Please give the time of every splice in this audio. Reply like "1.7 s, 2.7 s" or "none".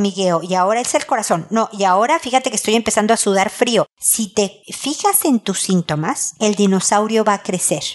none